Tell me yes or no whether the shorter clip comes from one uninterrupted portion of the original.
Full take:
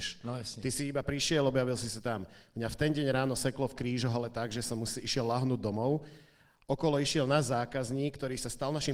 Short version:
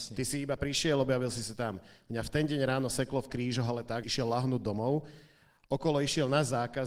no